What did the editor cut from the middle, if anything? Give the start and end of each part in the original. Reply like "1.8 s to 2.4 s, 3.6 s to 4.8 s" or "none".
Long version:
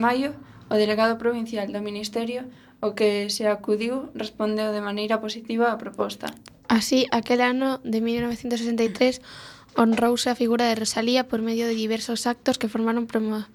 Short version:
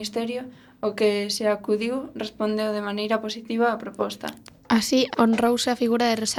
7.1 s to 9.7 s